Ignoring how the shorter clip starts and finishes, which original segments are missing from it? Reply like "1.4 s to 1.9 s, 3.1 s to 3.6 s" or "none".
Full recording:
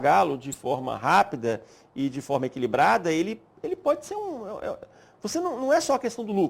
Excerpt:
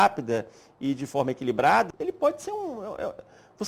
3.1 s to 3.5 s